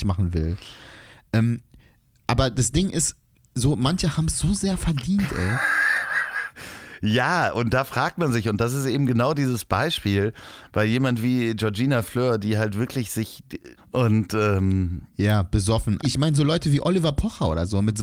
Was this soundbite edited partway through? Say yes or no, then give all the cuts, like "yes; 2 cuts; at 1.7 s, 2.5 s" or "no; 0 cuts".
yes; 2 cuts; at 13.8 s, 16.0 s